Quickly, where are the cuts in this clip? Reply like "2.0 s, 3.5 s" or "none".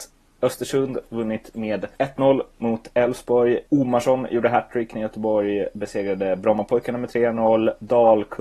1.9 s, 3.7 s